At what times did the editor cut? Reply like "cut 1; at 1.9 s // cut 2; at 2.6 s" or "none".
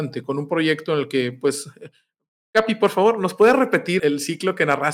cut 1; at 4.0 s